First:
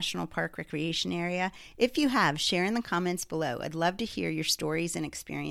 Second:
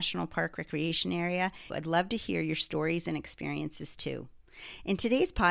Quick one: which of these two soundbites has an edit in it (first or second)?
second